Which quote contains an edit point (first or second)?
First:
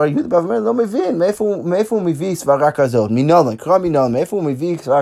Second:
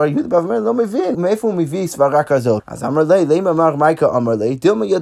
second